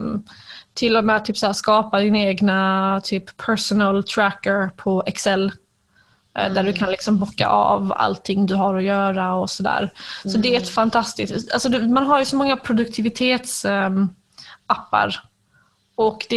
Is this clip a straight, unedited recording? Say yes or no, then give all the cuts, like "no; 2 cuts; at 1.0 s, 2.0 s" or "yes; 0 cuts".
yes; 0 cuts